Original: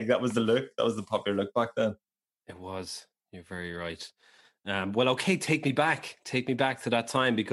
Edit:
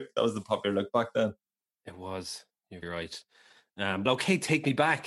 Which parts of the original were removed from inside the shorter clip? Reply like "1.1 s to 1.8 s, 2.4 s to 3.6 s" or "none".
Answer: 3.4 s to 3.7 s, 4.9 s to 5.0 s